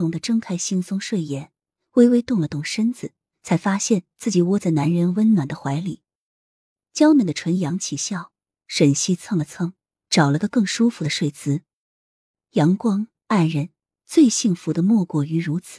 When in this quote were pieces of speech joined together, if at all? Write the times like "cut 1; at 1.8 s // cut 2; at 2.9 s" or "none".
none